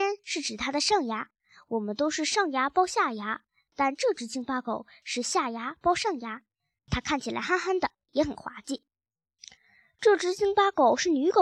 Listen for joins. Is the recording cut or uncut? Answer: uncut